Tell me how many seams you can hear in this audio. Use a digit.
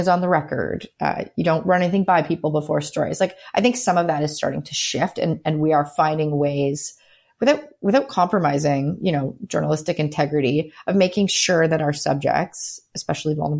0